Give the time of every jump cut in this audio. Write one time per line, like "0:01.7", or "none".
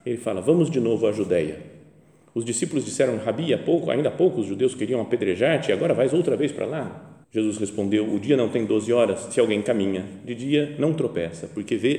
0:07.2